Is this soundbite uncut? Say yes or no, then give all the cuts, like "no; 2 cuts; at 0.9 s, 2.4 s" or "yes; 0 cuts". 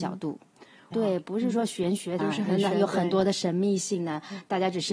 no; 2 cuts; at 0.9 s, 2.2 s